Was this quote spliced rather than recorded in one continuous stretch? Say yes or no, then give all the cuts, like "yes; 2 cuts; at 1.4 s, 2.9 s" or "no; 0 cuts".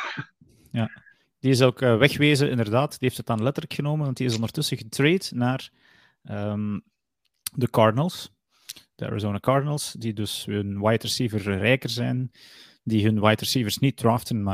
no; 0 cuts